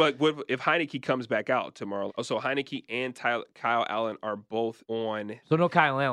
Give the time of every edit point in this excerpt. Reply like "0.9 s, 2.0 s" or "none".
2.1 s, 4.8 s